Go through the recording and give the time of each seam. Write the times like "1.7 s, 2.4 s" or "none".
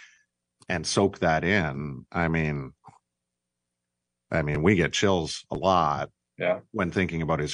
none